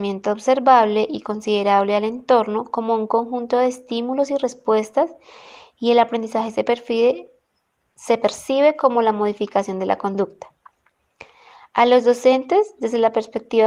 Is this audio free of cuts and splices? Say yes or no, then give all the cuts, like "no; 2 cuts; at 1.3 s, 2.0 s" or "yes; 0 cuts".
yes; 0 cuts